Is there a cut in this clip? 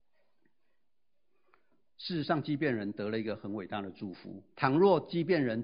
yes; 1 cut; at 4.5 s

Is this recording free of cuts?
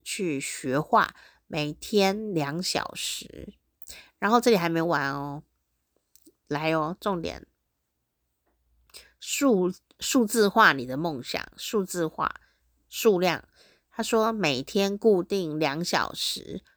yes; 0 cuts

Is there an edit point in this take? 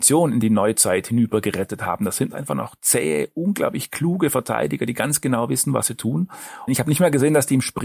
yes; 1 cut; at 6.7 s

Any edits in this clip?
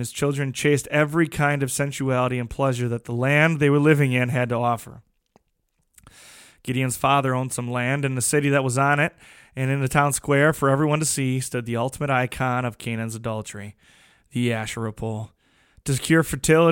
no; 0 cuts

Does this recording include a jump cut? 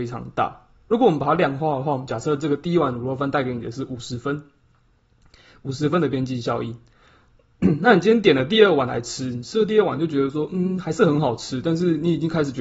no; 0 cuts

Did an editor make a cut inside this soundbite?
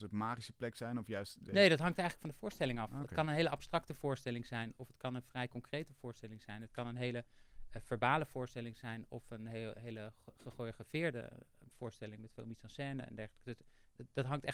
no; 0 cuts

